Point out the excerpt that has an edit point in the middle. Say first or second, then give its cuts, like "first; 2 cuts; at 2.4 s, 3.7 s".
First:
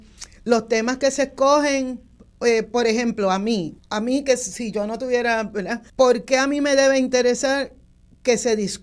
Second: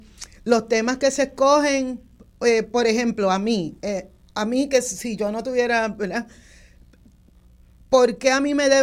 first; 2 cuts; at 3.8 s, 5.9 s